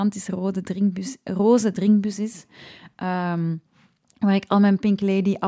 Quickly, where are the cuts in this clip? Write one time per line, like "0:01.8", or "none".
none